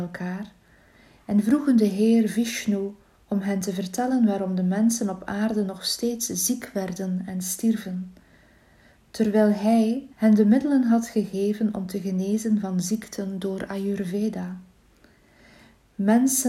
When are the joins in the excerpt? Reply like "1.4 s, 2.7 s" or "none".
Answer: 10.1 s